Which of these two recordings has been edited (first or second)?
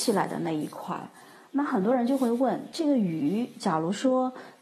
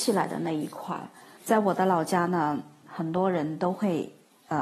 second